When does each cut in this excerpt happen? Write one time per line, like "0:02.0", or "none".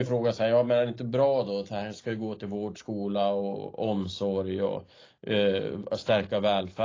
none

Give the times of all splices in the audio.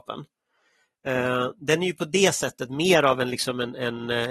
none

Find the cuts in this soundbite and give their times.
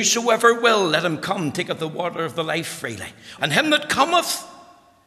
0:03.4

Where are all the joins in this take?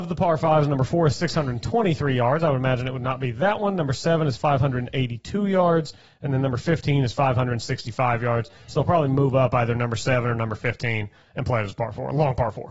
none

